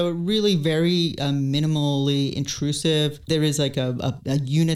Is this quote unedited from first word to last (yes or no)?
yes